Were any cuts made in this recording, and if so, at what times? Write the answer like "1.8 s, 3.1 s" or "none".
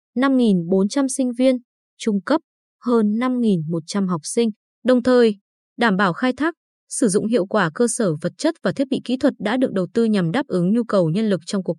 4.7 s

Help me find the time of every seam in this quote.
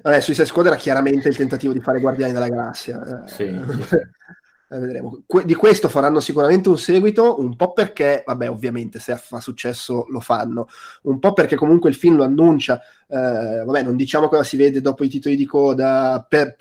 none

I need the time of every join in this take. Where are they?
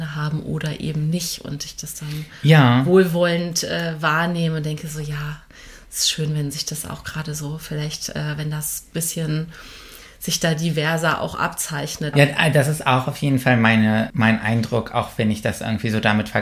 12.1 s, 14.1 s

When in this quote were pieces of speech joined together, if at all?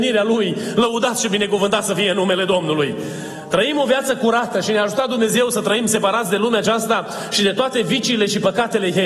none

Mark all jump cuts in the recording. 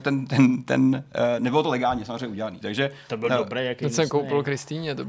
2.6 s

